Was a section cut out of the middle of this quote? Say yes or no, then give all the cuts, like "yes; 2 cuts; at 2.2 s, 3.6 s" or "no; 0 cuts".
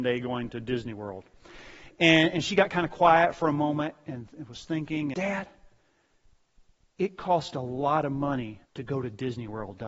yes; 2 cuts; at 5.1 s, 8.6 s